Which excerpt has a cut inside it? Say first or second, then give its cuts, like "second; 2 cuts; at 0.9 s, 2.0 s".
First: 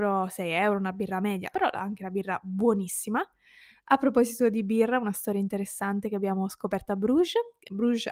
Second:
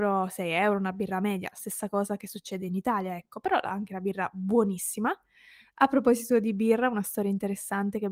first; 1 cut; at 1.5 s